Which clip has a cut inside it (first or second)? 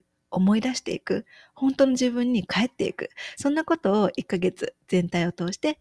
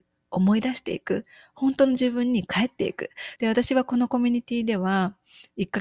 second